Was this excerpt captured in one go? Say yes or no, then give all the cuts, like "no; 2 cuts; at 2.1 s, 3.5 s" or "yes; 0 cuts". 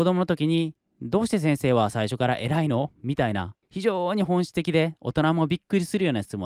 no; 1 cut; at 3.6 s